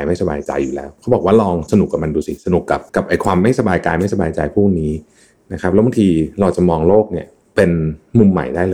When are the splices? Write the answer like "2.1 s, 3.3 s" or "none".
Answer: 2.9 s